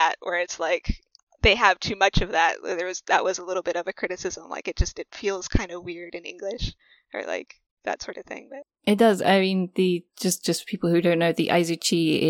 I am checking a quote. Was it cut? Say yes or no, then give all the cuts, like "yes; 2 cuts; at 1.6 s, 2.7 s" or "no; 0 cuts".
no; 0 cuts